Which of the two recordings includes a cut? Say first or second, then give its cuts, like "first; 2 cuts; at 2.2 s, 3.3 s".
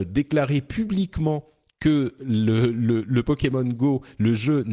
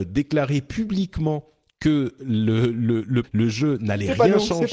second; 1 cut; at 3.2 s